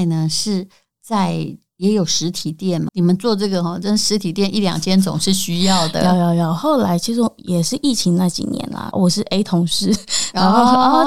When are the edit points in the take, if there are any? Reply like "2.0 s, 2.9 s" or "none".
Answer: 2.9 s, 8.9 s